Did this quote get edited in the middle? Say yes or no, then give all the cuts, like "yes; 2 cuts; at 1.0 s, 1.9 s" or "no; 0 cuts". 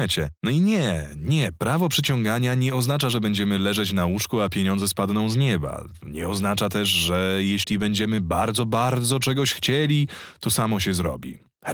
no; 0 cuts